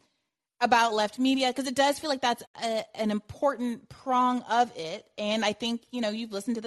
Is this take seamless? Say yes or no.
yes